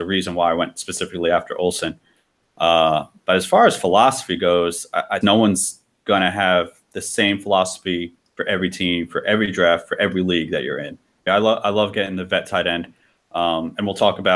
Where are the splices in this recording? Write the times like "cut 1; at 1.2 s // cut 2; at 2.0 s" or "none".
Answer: cut 1; at 5.2 s // cut 2; at 11.3 s